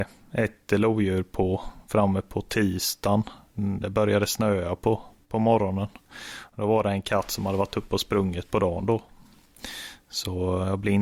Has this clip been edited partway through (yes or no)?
no